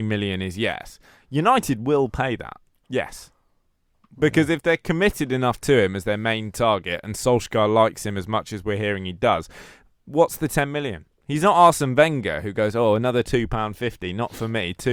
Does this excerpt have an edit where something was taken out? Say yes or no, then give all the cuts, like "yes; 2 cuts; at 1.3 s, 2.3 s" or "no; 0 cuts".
yes; 1 cut; at 2.8 s